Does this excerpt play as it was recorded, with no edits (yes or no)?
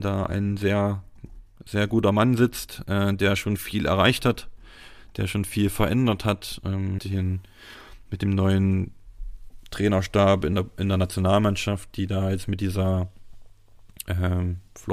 no